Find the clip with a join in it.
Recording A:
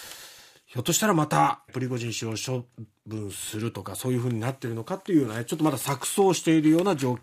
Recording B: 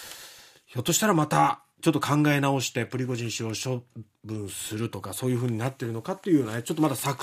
A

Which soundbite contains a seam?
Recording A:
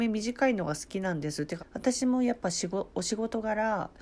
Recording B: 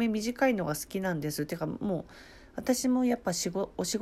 A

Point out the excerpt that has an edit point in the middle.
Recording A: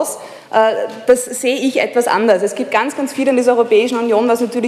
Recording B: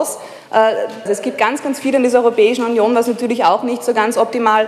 B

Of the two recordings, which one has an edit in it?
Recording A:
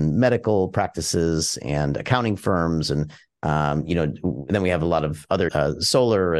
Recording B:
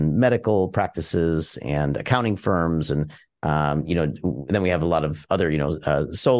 A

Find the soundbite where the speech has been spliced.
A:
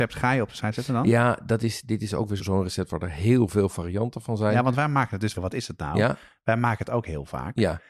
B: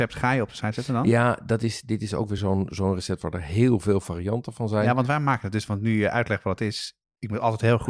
A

